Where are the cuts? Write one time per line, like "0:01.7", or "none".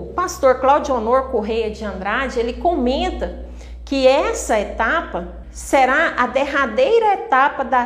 0:05.4